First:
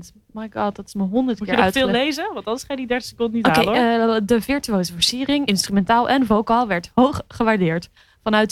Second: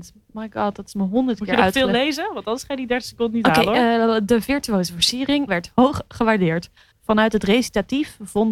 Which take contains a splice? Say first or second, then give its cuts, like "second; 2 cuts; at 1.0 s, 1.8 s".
second; 2 cuts; at 5.5 s, 6.9 s